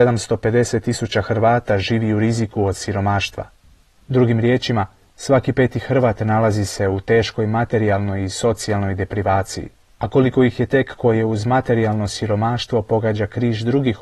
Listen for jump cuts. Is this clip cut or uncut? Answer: uncut